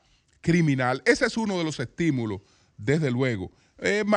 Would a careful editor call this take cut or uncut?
uncut